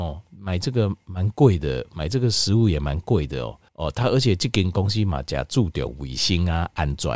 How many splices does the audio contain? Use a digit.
1